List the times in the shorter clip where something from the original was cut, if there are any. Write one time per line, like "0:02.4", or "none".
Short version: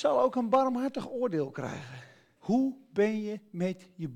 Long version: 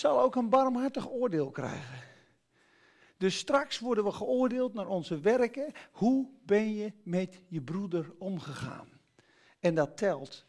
0:02.4